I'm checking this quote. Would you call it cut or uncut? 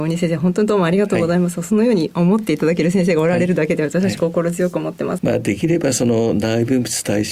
cut